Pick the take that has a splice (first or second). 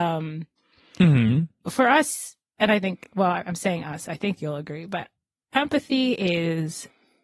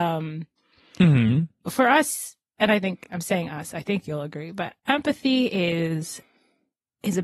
second